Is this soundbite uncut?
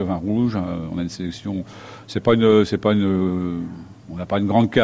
yes; 0 cuts

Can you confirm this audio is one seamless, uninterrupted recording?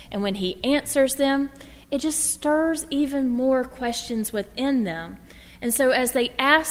yes; 0 cuts

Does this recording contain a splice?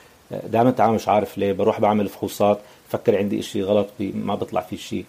no; 0 cuts

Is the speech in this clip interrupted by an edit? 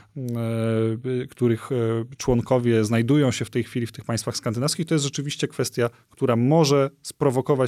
no; 0 cuts

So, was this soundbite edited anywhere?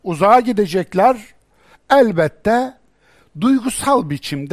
yes; 1 cut; at 1.7 s

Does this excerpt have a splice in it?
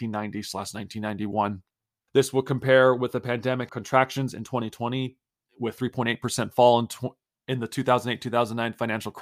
yes; 2 cuts; at 2.1 s, 3.7 s

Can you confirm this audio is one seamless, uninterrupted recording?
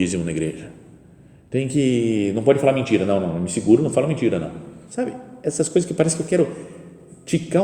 no; 1 cut; at 4.9 s

